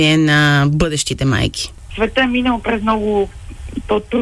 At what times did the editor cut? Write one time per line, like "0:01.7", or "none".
0:01.9